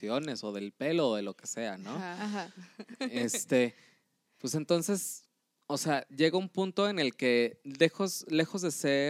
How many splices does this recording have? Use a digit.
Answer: 0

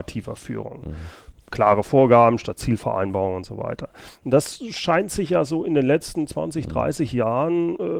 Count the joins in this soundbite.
0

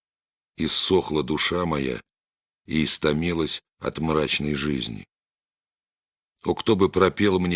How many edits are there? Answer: 0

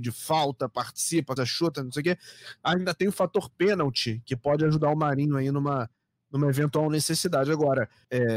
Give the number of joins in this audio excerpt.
1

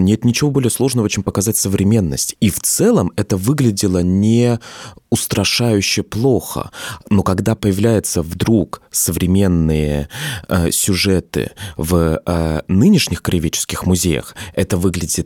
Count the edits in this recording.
1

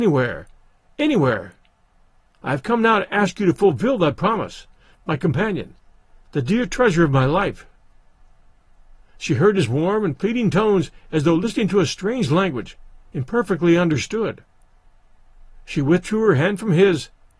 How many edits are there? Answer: 2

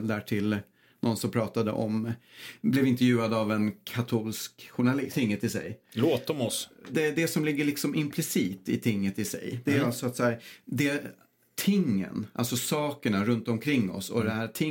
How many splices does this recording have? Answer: 1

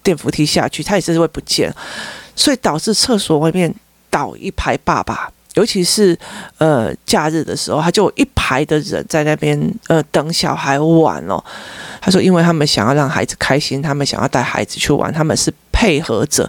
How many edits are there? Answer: 1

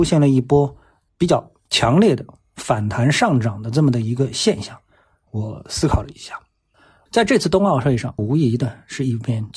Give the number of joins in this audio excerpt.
3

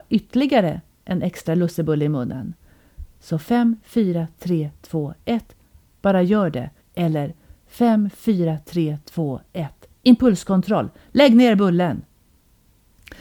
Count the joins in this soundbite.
1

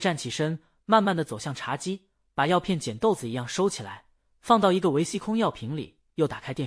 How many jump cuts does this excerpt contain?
0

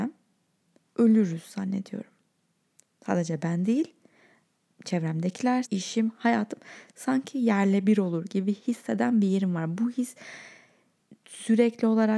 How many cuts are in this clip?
1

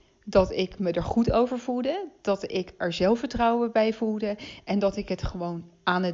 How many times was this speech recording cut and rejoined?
0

